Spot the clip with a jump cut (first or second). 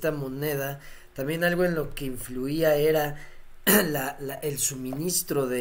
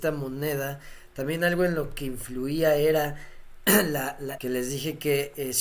second